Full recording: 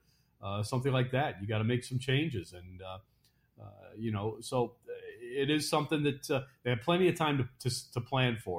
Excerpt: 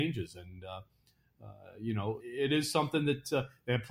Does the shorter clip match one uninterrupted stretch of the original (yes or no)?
no